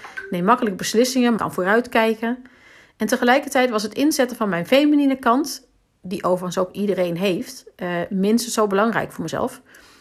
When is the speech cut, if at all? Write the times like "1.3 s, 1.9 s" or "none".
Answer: 1.4 s

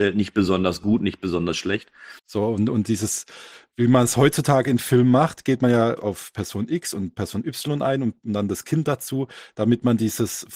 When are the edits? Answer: 2.2 s, 6.0 s

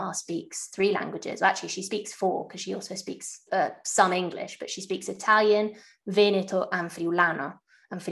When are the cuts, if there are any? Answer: 3.5 s

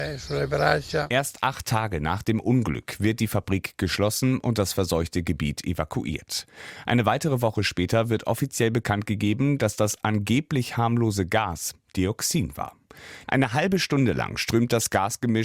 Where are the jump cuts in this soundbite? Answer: 13.3 s

